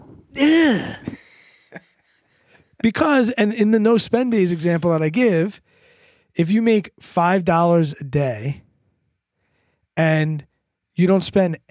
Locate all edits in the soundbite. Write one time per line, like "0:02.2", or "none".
none